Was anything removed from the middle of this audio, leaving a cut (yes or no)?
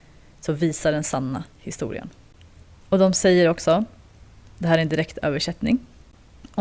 no